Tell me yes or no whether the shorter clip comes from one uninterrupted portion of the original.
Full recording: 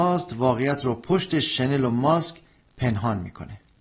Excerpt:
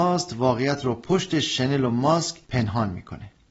no